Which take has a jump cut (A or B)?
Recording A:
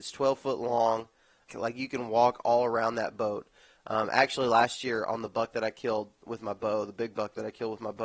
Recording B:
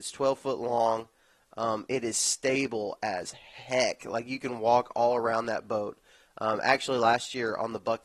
A